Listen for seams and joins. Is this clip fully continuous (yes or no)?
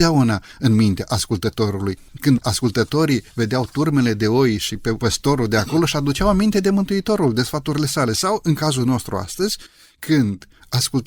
yes